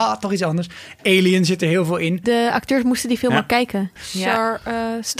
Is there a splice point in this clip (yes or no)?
yes